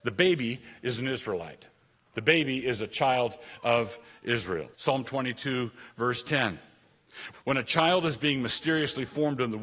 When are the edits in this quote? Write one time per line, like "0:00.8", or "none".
0:04.7
0:07.3